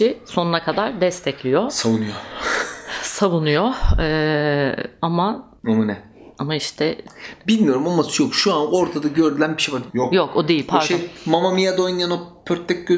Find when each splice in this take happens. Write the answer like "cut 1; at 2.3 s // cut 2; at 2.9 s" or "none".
cut 1; at 5.6 s // cut 2; at 9.9 s